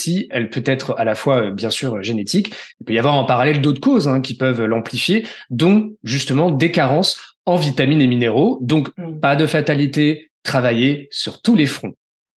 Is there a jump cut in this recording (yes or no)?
no